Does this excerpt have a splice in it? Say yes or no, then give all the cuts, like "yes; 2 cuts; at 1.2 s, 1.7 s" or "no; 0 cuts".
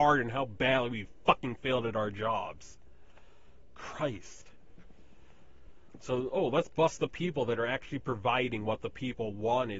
yes; 1 cut; at 6.0 s